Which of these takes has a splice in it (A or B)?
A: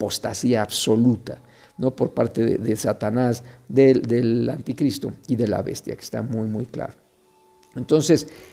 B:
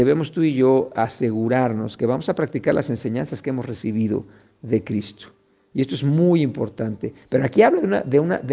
B